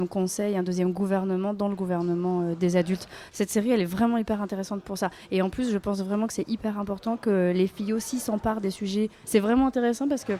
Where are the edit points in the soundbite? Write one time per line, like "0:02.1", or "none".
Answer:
0:09.2